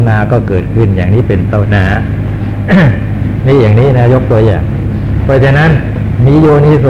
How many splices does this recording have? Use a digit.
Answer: 1